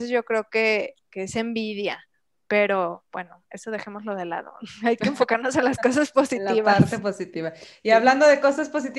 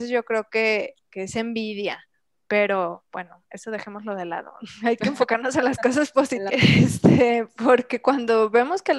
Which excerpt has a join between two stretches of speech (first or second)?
second